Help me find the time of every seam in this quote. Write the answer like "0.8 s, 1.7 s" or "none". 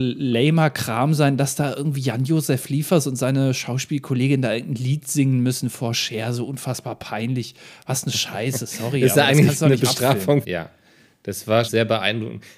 10.4 s, 11.7 s